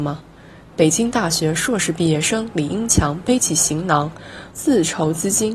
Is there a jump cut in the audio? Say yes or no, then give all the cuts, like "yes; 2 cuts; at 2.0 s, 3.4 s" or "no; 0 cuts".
yes; 1 cut; at 4.5 s